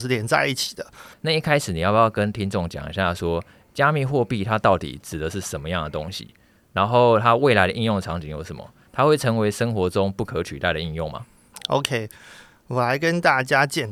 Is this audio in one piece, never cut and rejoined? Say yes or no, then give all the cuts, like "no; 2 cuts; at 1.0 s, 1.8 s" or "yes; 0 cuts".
no; 1 cut; at 1.1 s